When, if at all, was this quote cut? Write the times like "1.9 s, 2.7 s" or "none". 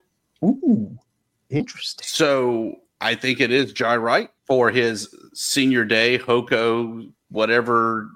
4.4 s